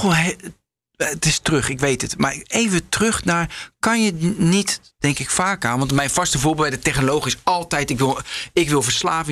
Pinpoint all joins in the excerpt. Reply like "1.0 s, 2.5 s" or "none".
none